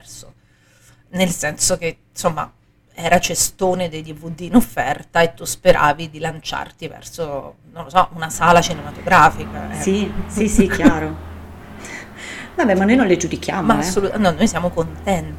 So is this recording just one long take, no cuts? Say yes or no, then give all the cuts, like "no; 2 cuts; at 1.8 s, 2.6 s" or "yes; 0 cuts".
yes; 0 cuts